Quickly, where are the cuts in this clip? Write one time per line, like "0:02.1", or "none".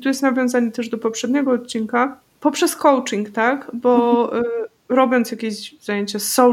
none